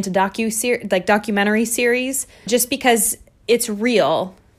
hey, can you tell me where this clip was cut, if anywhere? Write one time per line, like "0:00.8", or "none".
0:02.5